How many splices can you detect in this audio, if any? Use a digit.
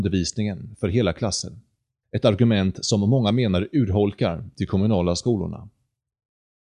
1